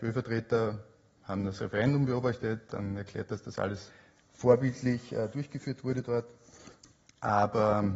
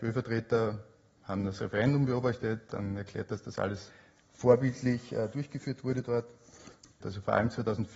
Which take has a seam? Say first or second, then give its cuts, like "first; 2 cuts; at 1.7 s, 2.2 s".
second; 1 cut; at 7.0 s